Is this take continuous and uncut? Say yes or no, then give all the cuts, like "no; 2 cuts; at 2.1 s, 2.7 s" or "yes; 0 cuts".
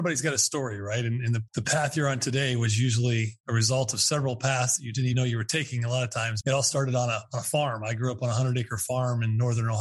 no; 3 cuts; at 1.5 s, 5.1 s, 6.4 s